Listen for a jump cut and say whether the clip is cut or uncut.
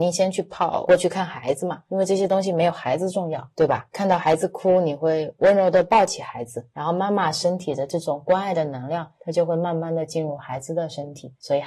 uncut